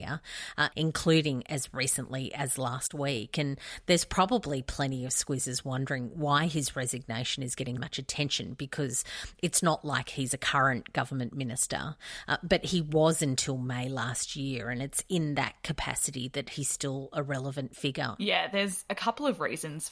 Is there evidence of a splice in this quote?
yes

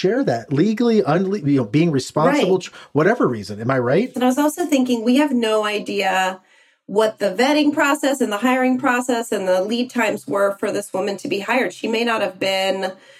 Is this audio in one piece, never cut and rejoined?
no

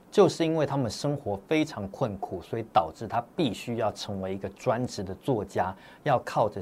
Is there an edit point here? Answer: no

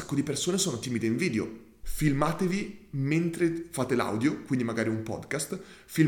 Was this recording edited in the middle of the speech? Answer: yes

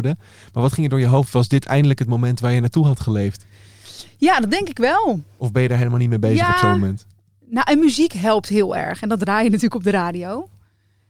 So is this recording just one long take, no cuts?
yes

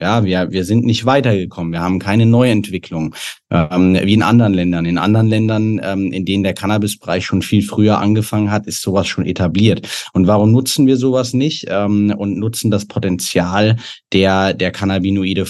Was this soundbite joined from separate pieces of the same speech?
no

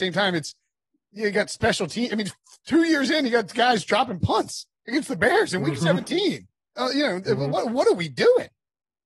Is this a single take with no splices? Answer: yes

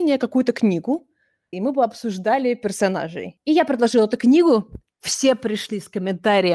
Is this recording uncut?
no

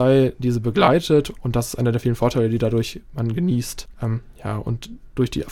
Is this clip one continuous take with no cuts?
no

